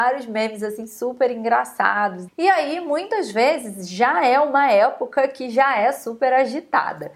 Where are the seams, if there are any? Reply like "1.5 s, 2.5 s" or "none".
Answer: 2.3 s